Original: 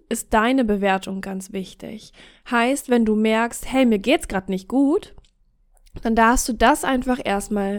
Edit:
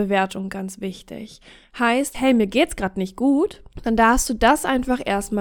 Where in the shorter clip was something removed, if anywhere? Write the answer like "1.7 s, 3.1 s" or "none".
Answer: 2.1 s, 3.7 s